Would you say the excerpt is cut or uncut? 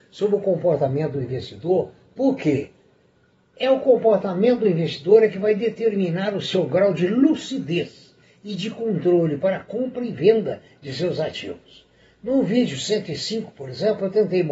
uncut